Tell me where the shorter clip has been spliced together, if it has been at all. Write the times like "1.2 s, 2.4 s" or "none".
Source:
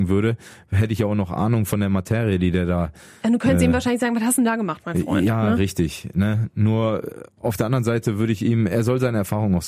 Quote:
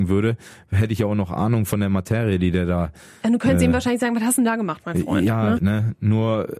5.6 s